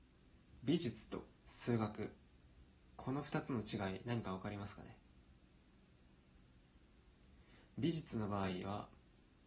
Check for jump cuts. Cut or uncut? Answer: cut